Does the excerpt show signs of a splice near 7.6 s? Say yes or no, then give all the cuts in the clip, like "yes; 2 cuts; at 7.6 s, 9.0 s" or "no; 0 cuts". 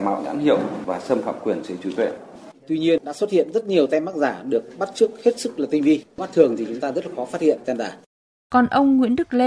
yes; 2 cuts; at 2.5 s, 7.6 s